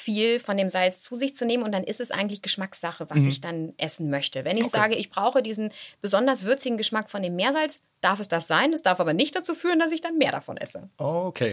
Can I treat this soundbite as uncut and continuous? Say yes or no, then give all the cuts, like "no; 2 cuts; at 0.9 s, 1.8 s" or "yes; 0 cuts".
yes; 0 cuts